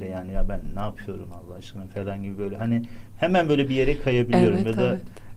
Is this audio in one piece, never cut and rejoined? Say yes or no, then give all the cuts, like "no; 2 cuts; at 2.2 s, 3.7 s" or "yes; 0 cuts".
yes; 0 cuts